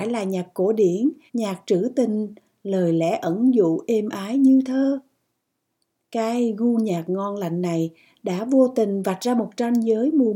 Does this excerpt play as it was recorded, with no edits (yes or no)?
no